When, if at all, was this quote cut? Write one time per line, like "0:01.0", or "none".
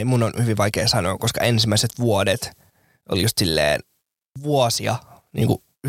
none